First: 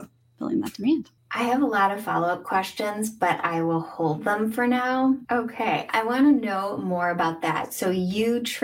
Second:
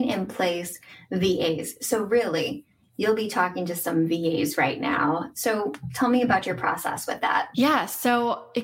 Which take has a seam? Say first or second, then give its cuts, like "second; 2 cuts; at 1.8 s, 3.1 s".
first; 1 cut; at 5.2 s